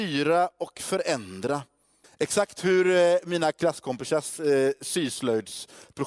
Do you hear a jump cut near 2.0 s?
yes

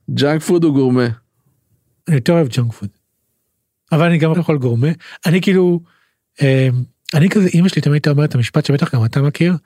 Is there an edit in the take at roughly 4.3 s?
yes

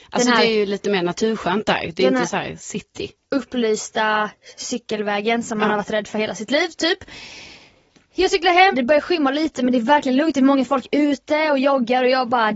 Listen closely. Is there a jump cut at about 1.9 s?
no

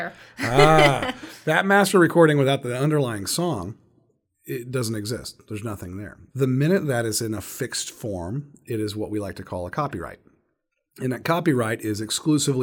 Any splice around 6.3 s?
yes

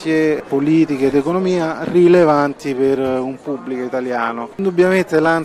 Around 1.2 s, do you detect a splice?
no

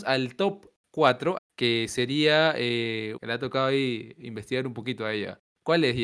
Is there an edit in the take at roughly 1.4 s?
yes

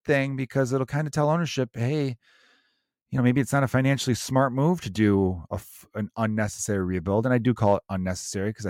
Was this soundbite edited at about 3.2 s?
no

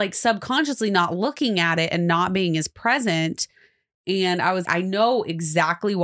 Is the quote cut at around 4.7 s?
yes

